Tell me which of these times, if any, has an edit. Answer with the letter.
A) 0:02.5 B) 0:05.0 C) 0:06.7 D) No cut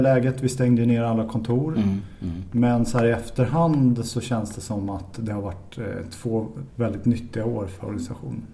C